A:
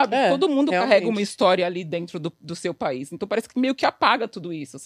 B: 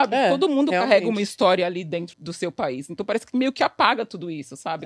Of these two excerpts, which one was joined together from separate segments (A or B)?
B